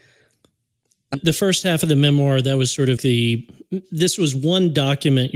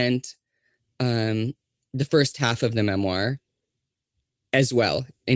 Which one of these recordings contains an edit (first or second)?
first